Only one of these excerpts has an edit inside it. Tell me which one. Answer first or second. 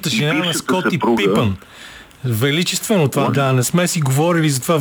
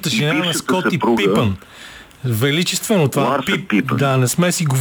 first